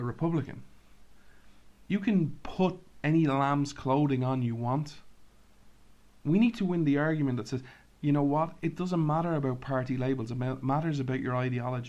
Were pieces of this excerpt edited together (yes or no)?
no